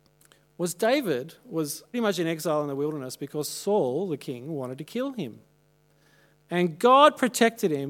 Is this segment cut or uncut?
cut